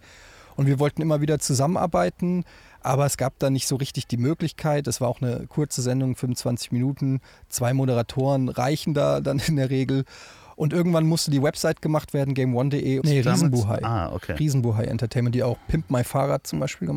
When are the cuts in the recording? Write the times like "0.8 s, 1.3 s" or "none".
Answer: 13.0 s